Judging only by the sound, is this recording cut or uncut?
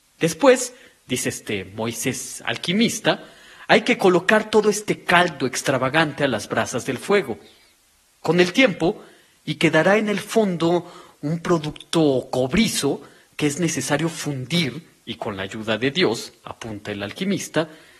cut